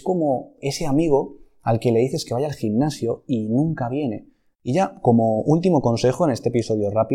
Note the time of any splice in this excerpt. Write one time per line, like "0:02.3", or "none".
0:04.5